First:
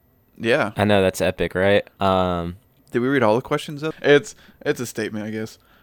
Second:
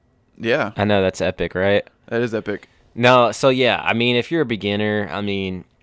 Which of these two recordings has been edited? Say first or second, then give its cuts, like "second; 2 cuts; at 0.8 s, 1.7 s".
first; 2 cuts; at 2.0 s, 3.9 s